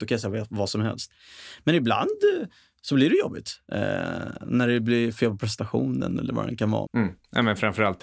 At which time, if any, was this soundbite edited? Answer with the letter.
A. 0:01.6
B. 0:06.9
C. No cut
B